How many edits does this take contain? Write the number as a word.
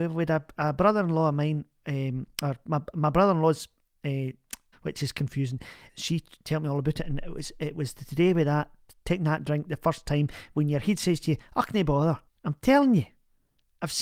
three